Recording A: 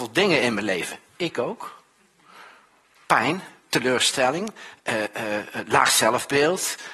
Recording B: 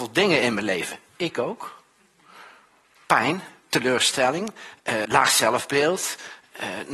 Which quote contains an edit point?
B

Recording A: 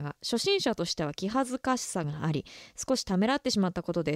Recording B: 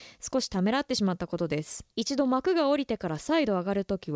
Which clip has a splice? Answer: B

